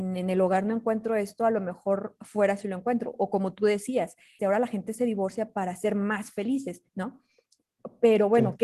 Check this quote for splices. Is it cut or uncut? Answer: cut